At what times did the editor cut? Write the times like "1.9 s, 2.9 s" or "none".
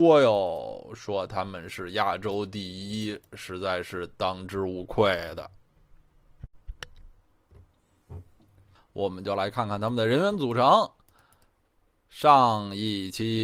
8.8 s